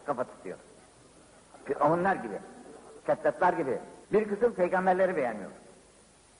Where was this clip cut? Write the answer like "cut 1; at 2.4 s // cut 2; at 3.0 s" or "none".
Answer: cut 1; at 3.0 s // cut 2; at 4.0 s